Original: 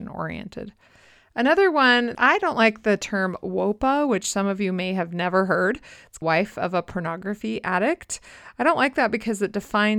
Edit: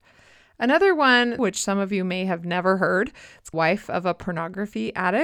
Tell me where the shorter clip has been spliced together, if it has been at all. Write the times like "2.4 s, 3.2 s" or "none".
1.4 s